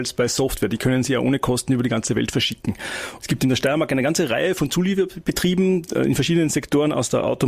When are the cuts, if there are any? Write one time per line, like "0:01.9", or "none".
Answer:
0:03.2